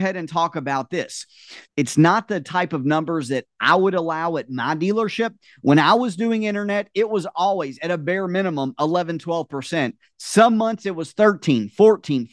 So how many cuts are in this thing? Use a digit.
1